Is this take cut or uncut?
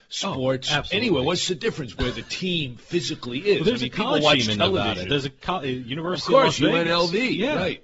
uncut